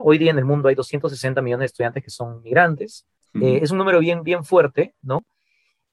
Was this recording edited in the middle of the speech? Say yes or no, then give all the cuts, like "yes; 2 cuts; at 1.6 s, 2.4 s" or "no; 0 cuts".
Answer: yes; 1 cut; at 3.2 s